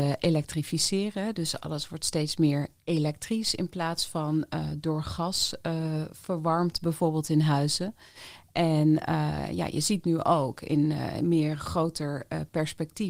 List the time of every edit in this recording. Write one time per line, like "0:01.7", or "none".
none